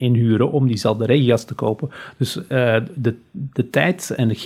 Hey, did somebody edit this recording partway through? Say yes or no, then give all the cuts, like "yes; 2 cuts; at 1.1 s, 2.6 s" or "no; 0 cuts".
no; 0 cuts